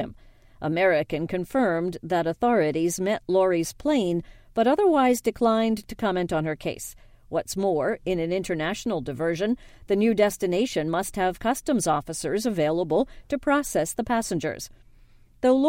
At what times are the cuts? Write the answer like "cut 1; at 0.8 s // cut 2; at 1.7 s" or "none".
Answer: cut 1; at 7.1 s